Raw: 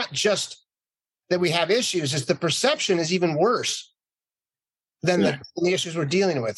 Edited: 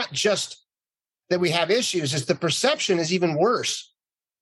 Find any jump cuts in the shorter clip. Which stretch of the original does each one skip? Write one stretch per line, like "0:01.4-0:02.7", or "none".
none